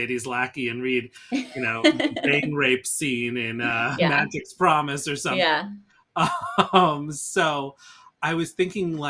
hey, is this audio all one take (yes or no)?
yes